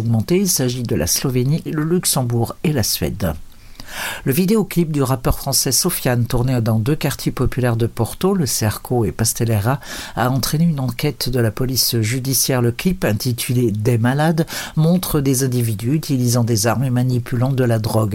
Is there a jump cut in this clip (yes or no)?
yes